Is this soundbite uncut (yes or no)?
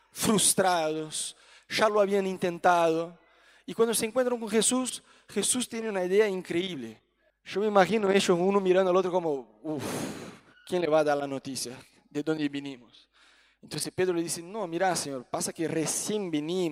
no